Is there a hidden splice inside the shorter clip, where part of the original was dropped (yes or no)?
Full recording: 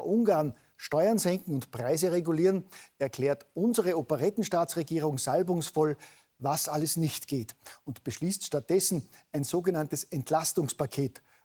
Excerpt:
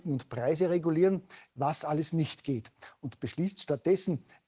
yes